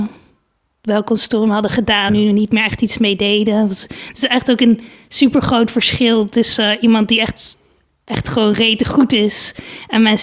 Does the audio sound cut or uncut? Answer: cut